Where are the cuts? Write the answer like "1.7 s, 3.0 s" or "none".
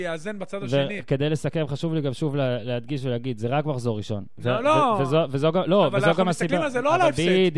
none